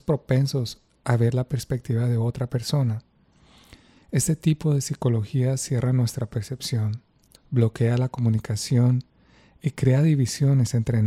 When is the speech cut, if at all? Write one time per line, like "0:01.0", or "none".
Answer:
0:07.4

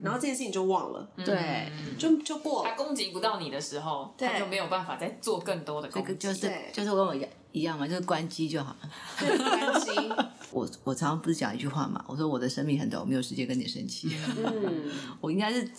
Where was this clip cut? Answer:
none

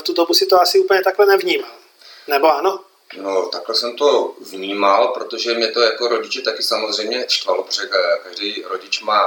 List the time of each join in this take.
none

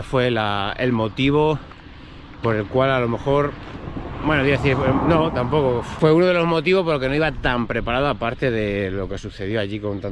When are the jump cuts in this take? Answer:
none

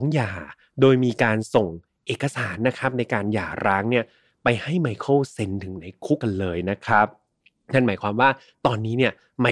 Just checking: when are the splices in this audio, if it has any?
0:06.2

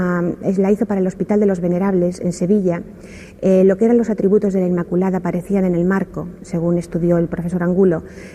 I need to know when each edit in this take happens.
none

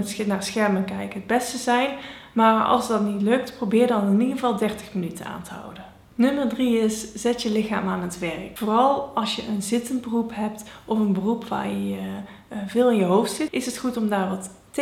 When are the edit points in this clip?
0:13.5

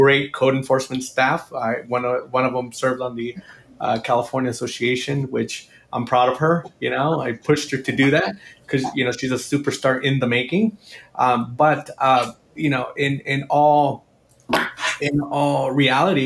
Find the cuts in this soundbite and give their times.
none

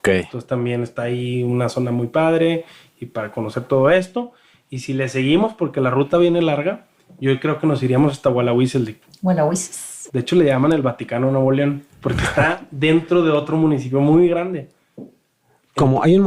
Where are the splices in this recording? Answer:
0:10.1

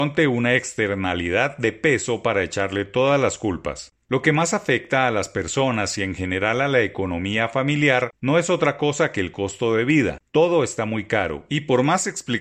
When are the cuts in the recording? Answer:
none

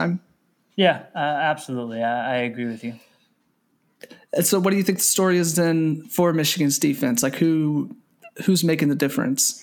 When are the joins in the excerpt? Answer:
none

